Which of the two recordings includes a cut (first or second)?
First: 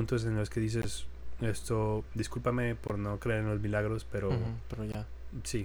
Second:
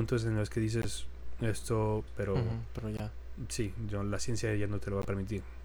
second